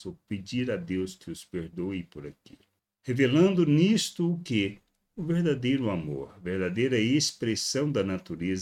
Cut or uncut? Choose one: uncut